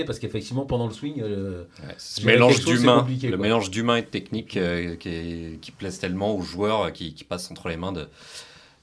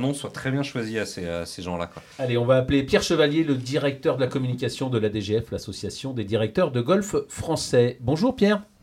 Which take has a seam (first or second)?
second